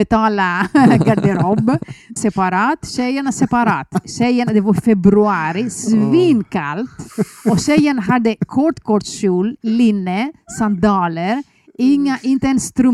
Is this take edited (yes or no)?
yes